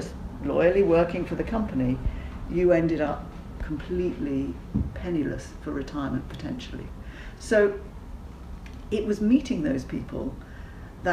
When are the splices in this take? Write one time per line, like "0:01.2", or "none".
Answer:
none